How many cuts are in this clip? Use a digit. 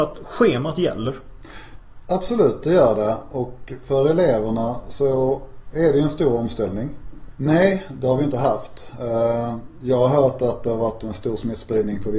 1